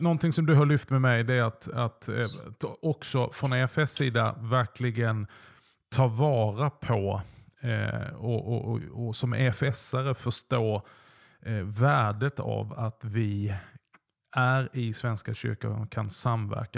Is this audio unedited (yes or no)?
yes